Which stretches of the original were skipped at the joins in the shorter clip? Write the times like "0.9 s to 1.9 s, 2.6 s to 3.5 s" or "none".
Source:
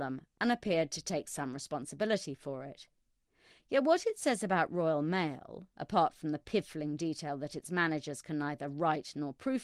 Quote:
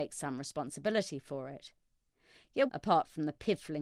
3.8 s to 5.7 s